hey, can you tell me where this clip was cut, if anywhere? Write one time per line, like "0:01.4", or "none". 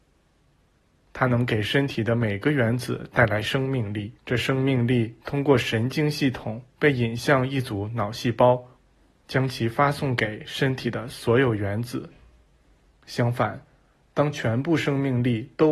0:04.2
0:09.2
0:12.9